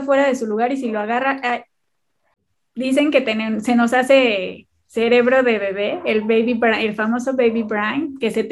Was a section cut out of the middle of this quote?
no; 0 cuts

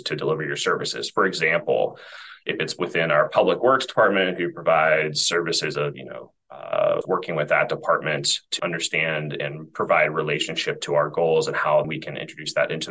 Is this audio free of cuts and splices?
no; 3 cuts; at 7.0 s, 8.6 s, 11.8 s

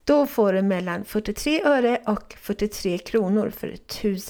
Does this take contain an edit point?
no; 0 cuts

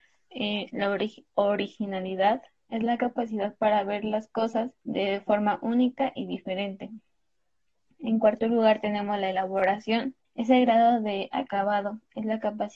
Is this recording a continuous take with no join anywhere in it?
no; 2 cuts; at 4.8 s, 10.2 s

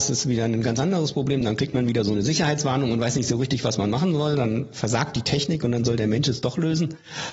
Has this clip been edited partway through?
no; 0 cuts

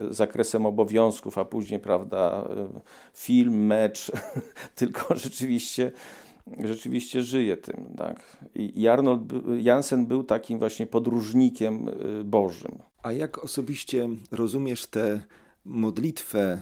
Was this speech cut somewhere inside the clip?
no; 0 cuts

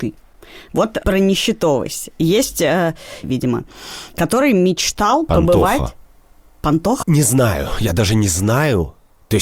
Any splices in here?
yes; 2 cuts; at 3.2 s, 7.0 s

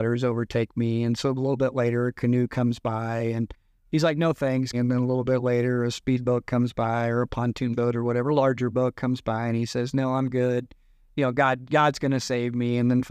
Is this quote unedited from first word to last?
no; 1 cut; at 4.7 s

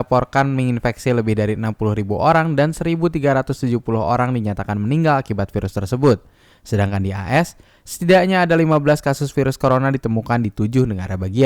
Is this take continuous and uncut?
yes; 0 cuts

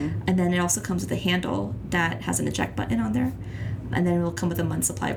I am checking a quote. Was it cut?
no; 0 cuts

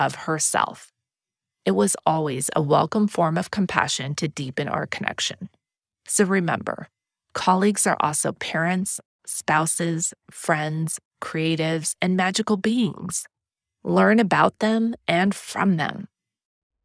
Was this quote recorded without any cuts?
yes; 0 cuts

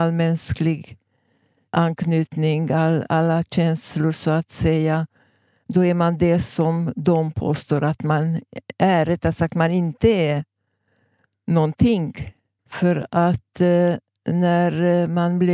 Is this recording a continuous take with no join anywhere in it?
no; 1 cut; at 12.6 s

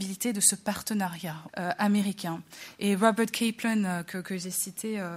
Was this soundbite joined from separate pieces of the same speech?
yes; 1 cut; at 1.5 s

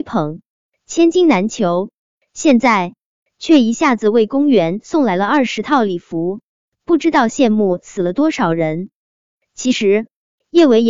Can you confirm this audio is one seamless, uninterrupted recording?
yes; 0 cuts

